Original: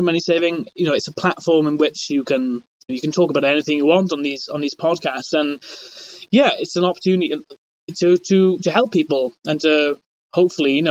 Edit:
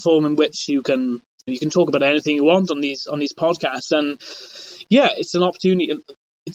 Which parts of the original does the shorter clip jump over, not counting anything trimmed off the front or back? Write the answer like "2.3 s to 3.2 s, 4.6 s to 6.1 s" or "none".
none